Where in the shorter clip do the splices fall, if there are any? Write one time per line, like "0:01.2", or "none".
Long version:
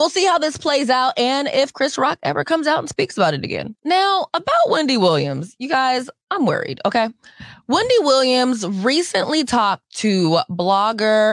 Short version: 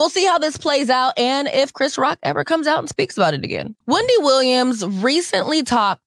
0:03.8